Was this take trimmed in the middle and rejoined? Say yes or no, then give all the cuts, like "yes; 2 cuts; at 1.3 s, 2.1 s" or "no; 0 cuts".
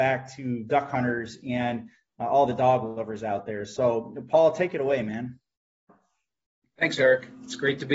no; 0 cuts